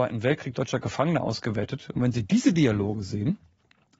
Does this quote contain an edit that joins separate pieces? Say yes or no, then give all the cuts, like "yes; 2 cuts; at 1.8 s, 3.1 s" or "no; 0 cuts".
no; 0 cuts